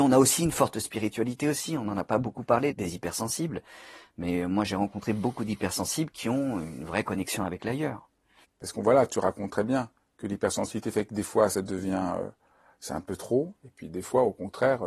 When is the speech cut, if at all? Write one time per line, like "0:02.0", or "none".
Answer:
0:02.7
0:08.4

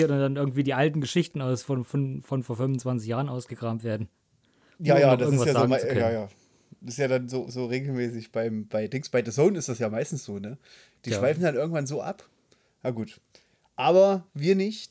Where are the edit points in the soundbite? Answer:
none

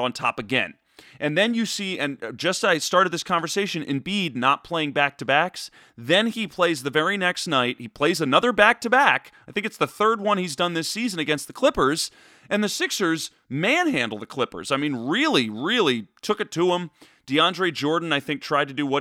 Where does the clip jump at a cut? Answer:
none

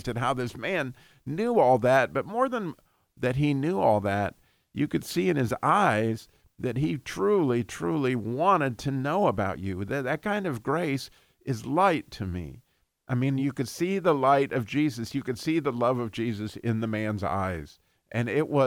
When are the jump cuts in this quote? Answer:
none

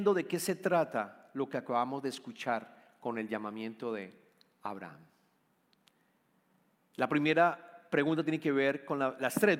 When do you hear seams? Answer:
none

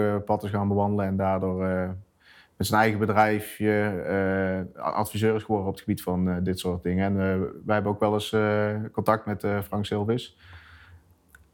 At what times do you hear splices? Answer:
none

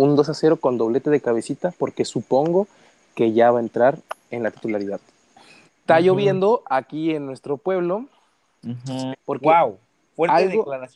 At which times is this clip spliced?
0:05.7
0:09.1

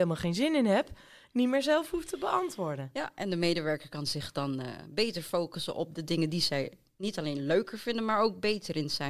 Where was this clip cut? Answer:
none

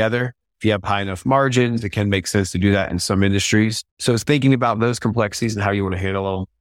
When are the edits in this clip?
0:03.9

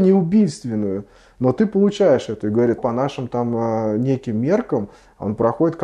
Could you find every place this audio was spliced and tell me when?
0:02.8

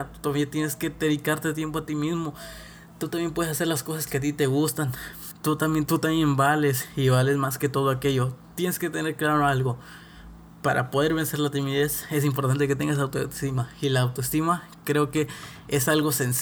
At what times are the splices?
0:05.9

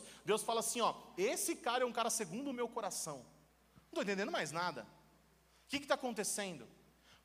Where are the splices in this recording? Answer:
none

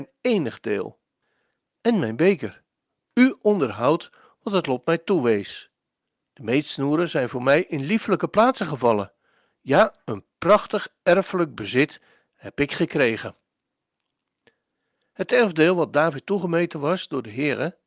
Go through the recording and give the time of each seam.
none

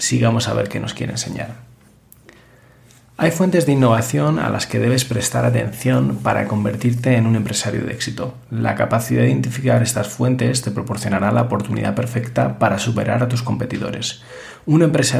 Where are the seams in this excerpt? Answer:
none

